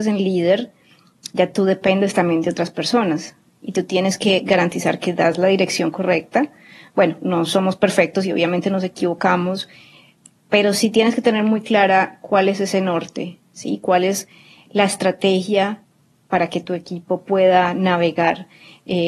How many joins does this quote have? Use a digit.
0